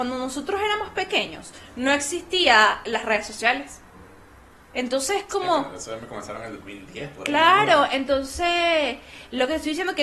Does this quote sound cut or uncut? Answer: uncut